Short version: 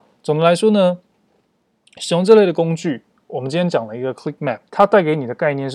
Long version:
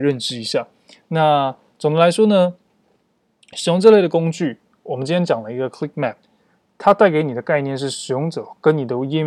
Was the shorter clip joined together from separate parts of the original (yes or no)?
yes